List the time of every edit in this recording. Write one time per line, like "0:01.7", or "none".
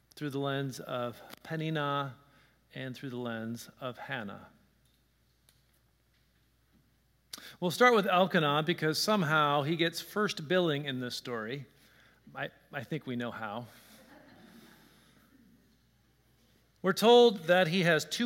none

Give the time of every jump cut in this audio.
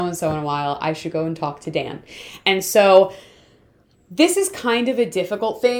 none

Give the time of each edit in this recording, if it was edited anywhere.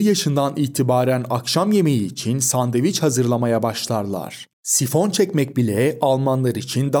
0:04.5

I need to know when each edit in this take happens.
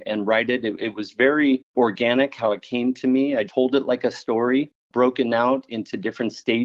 0:03.5

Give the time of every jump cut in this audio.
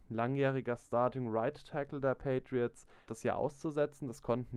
0:03.1

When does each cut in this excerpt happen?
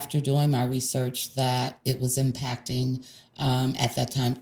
none

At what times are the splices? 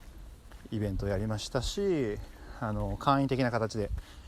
none

